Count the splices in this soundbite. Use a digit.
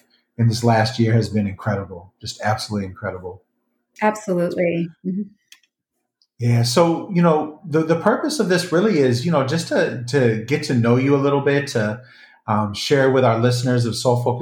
0